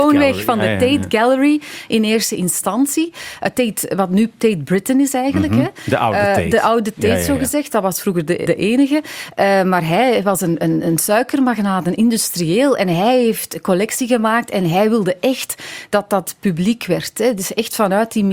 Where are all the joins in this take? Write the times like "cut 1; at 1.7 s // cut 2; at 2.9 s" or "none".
cut 1; at 8.5 s